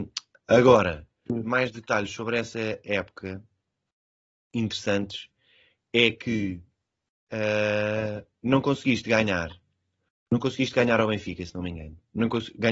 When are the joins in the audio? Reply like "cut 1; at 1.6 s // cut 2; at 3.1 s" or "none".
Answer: cut 1; at 1.3 s